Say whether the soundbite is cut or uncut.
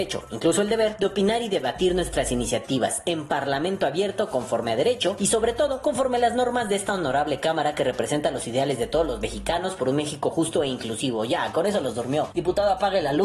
uncut